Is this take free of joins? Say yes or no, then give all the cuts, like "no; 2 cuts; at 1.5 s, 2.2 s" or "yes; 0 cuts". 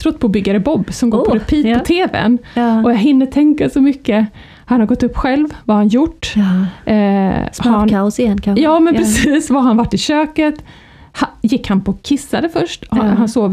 yes; 0 cuts